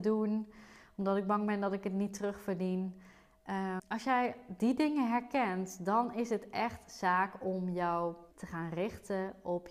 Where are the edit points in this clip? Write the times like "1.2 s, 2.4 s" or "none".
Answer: 3.8 s, 8.3 s